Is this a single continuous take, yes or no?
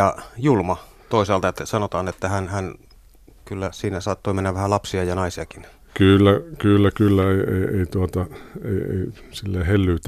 yes